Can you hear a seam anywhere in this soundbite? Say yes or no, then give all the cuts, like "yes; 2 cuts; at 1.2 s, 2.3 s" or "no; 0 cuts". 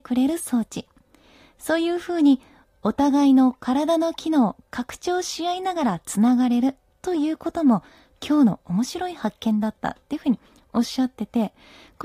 no; 0 cuts